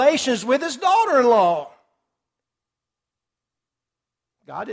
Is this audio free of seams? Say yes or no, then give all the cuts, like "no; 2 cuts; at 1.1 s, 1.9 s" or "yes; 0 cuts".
yes; 0 cuts